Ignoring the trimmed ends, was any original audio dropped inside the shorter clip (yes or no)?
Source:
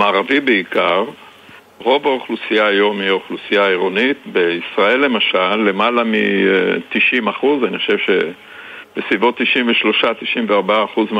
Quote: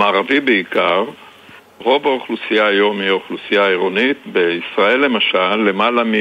no